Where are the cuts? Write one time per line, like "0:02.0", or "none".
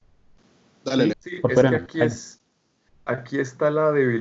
0:01.1